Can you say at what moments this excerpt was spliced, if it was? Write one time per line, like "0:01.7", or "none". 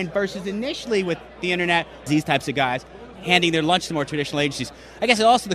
0:02.1
0:03.2